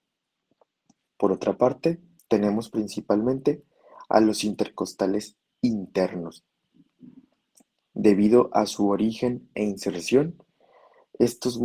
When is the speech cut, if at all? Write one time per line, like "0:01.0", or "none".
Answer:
0:02.2